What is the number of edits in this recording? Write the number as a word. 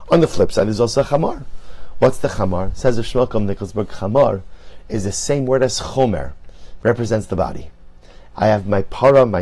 two